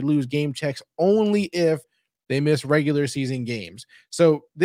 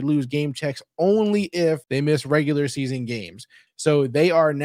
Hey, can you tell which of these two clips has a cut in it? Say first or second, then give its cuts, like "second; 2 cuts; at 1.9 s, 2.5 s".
second; 2 cuts; at 1.8 s, 3.7 s